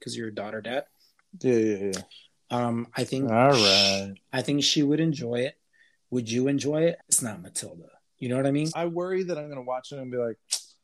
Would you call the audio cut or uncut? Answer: cut